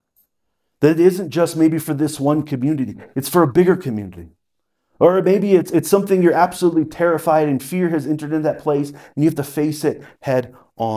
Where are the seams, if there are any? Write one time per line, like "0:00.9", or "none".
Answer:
none